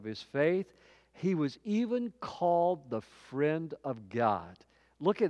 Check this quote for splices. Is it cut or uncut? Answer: uncut